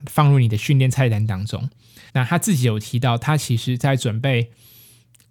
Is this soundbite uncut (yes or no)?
no